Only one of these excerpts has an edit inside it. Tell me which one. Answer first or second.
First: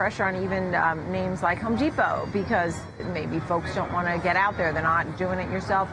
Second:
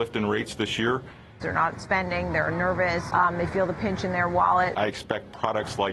second